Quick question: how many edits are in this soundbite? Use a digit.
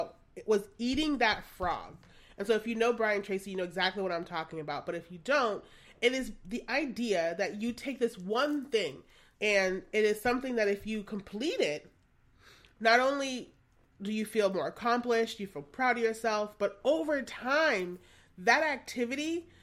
1